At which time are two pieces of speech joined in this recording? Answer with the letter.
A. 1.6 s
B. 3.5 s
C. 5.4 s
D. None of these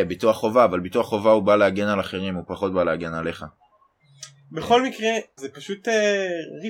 C